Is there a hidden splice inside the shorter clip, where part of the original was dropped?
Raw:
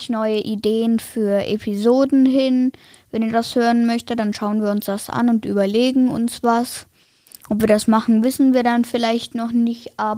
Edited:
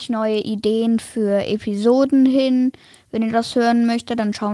no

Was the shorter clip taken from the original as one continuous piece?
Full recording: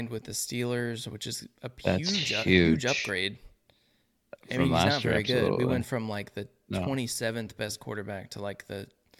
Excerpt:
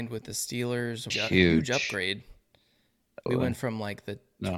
no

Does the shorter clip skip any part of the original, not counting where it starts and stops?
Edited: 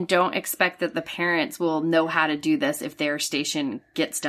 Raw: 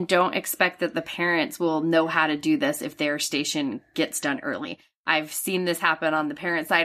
no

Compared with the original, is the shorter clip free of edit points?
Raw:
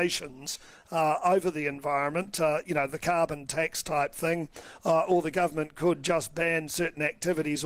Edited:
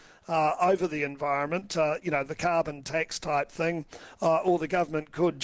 yes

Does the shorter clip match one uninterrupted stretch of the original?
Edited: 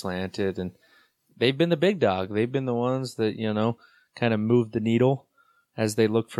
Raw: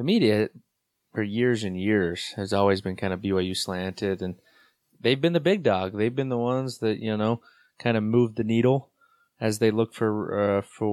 yes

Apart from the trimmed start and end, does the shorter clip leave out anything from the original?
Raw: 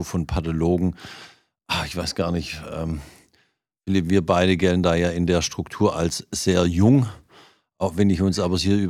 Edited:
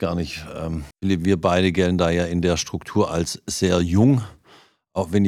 yes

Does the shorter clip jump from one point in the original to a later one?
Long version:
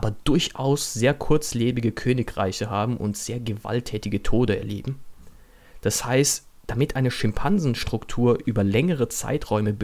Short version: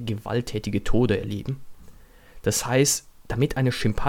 no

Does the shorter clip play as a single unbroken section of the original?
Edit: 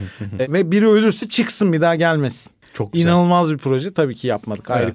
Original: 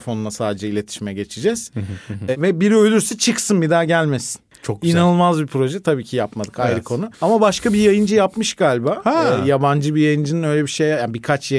yes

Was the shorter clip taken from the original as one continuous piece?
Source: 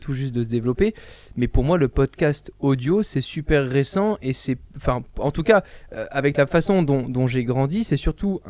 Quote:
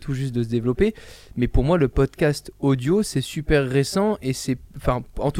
yes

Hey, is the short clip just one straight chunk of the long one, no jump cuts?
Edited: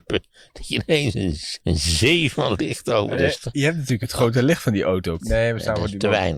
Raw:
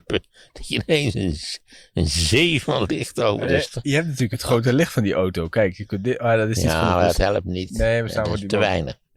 no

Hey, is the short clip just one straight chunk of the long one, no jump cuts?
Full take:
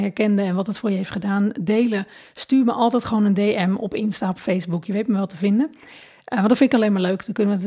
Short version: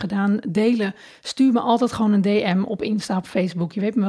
yes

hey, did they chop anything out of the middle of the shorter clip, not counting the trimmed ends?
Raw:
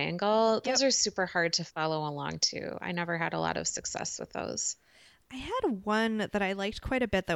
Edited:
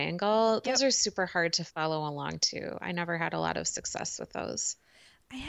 no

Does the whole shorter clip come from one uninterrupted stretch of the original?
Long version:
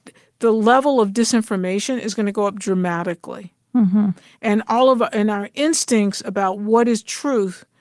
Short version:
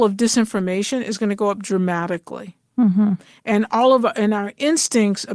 yes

